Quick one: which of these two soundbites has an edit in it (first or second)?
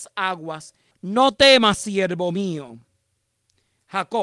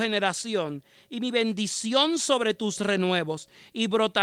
first